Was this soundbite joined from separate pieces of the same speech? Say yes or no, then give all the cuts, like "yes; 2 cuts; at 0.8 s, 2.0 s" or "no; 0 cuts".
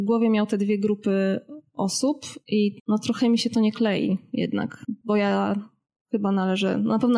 no; 0 cuts